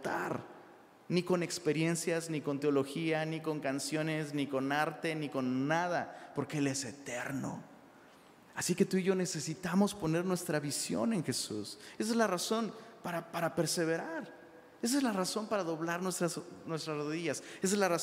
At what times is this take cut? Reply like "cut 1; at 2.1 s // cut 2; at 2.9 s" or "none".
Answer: none